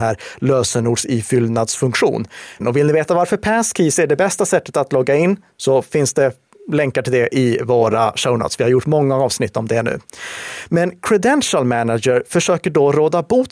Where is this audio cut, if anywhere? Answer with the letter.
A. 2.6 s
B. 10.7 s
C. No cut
A